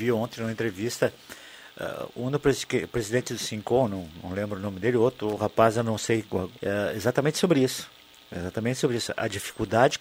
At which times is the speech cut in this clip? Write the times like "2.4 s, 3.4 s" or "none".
6.6 s